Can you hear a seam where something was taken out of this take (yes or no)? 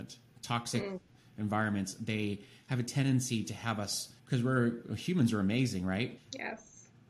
yes